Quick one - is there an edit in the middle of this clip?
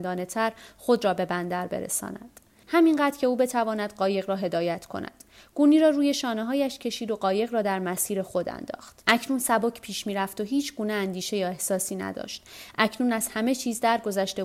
yes; 2 cuts; at 2.6 s, 9.0 s

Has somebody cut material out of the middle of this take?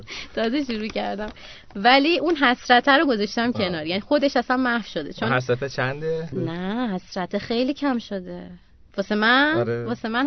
yes; 1 cut; at 6.3 s

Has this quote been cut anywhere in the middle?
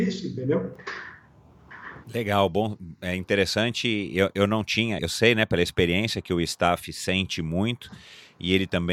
yes; 2 cuts; at 2.0 s, 5.0 s

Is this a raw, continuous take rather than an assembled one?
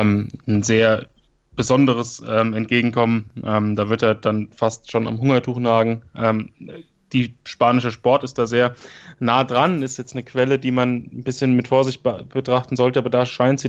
yes; 0 cuts

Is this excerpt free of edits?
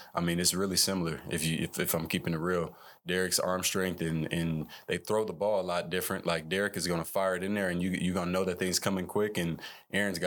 yes; 0 cuts

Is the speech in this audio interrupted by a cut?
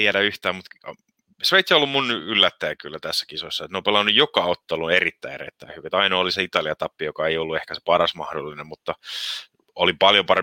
no; 0 cuts

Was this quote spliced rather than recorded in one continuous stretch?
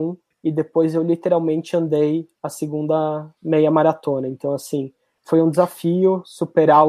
no; 0 cuts

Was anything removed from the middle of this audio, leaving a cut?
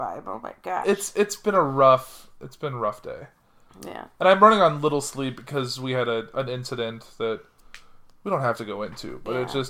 no; 0 cuts

